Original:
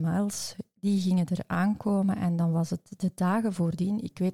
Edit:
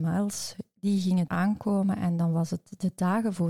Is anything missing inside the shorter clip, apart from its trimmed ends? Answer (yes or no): yes